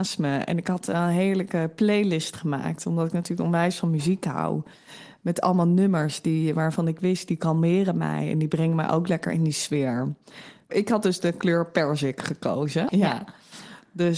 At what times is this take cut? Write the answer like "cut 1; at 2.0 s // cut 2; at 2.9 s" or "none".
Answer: cut 1; at 10.7 s // cut 2; at 12.9 s